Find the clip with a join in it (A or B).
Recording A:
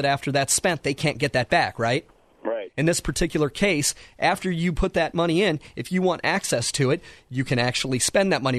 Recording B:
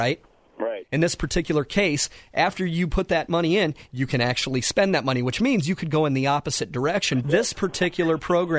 B